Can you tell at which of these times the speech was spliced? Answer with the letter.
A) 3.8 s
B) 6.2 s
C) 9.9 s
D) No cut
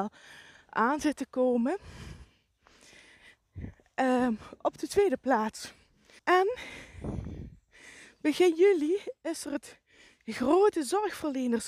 B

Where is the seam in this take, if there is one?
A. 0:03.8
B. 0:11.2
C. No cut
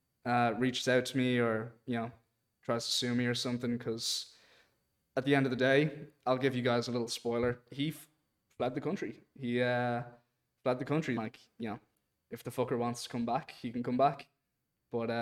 B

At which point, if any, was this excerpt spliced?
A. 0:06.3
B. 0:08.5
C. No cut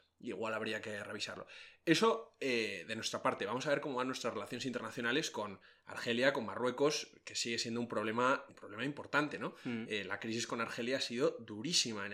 B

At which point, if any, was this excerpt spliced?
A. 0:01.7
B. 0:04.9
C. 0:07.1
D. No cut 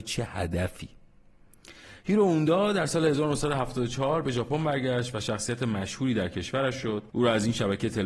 C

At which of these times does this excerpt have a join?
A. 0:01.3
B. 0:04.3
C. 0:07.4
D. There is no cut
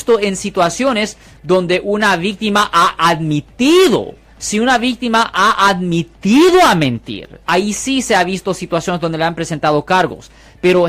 C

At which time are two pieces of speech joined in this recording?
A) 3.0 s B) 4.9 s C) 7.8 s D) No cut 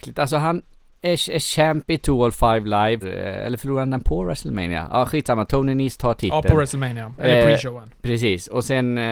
A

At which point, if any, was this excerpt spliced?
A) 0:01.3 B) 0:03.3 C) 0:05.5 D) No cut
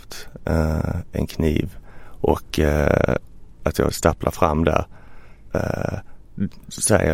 C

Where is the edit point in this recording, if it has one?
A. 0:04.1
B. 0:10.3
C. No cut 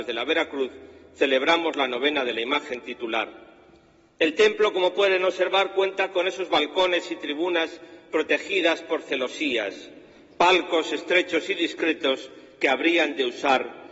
C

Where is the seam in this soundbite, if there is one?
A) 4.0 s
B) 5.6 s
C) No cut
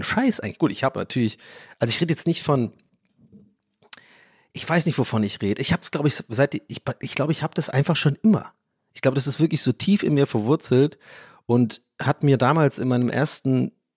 C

